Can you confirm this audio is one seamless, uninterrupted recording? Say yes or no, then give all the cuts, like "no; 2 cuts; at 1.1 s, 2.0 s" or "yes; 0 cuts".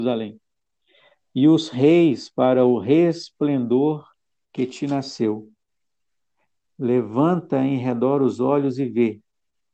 yes; 0 cuts